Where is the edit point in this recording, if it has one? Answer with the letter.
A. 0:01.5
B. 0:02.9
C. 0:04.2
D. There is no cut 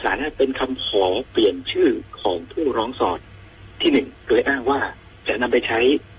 C